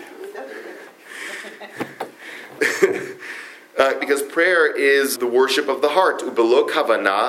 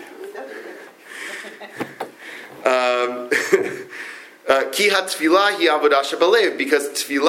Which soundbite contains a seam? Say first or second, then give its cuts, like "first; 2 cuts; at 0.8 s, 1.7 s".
first; 3 cuts; at 2.6 s, 4.0 s, 5.2 s